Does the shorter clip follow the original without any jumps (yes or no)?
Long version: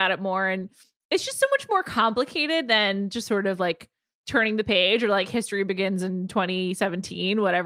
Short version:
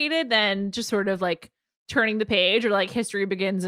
yes